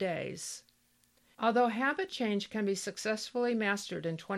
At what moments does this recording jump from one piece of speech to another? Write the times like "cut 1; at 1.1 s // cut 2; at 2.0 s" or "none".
cut 1; at 1.3 s

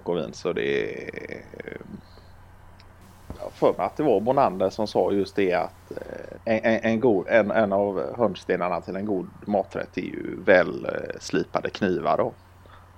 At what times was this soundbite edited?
cut 1; at 6.3 s

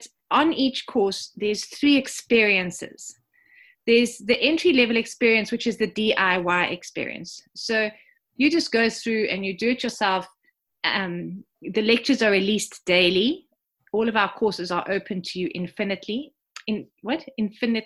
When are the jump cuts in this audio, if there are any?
none

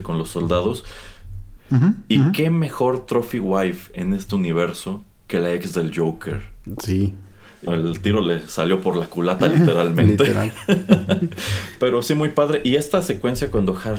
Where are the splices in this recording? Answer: cut 1; at 1.6 s // cut 2; at 7.7 s

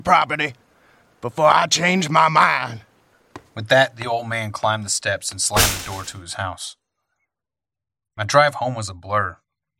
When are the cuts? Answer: none

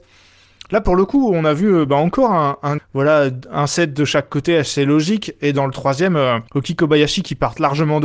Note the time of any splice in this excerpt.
cut 1; at 2.8 s // cut 2; at 6.5 s

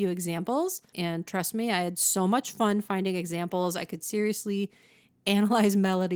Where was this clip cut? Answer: cut 1; at 0.9 s

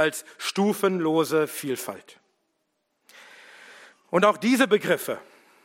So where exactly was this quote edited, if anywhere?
none

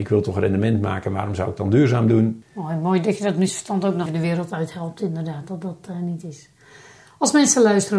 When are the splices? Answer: cut 1; at 2.4 s // cut 2; at 4.1 s

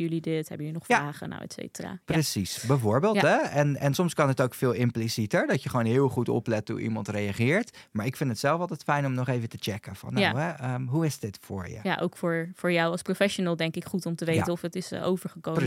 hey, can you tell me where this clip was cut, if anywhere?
none

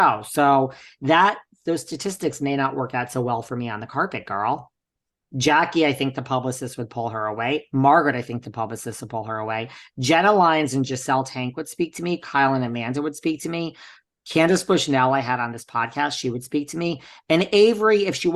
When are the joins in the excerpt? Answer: cut 1; at 5.3 s

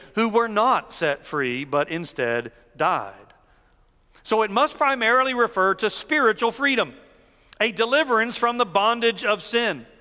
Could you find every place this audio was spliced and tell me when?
none

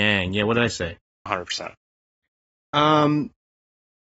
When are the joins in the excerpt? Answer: cut 1; at 1.3 s

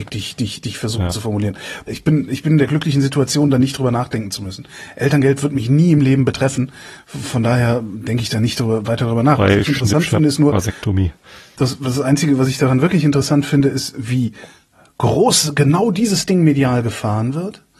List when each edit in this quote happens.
cut 1; at 1.9 s

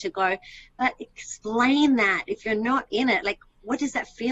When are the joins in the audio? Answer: none

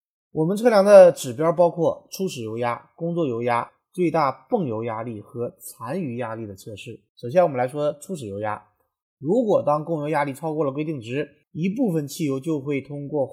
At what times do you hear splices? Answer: cut 1; at 7.1 s // cut 2; at 9.0 s // cut 3; at 11.4 s

